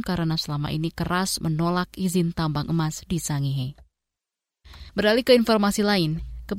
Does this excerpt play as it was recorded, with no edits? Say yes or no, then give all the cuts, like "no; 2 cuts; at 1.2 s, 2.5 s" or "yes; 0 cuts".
no; 1 cut; at 4.9 s